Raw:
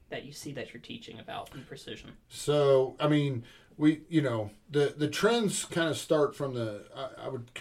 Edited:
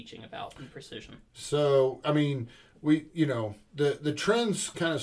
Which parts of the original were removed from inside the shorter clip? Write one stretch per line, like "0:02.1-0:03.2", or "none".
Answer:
none